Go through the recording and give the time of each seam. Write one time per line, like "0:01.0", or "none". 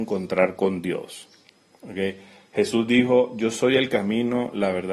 none